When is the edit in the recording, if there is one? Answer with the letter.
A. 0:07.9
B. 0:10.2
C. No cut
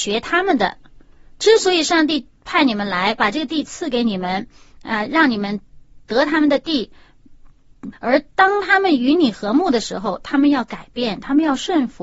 A